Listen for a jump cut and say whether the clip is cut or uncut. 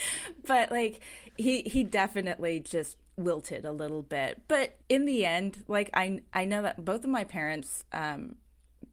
cut